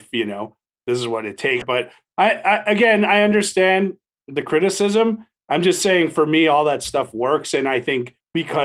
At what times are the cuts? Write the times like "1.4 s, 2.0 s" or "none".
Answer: 1.6 s

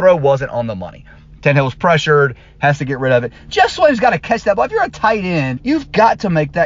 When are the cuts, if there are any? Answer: 5.6 s

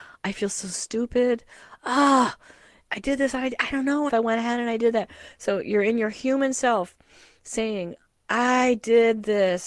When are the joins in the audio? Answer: 4.1 s

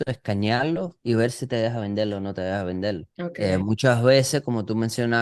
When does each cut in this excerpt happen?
3.1 s

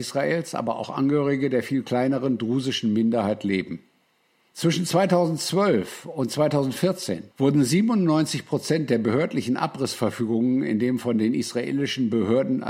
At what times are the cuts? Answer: 4.5 s, 7.3 s

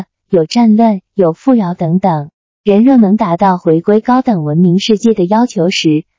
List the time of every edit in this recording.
2.5 s

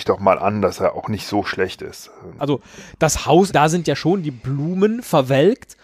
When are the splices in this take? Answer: 2.4 s, 3.5 s

